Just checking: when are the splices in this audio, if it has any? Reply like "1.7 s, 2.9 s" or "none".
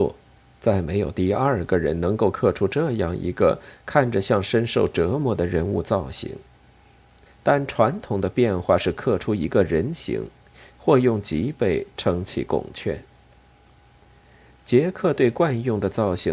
7.2 s, 10.7 s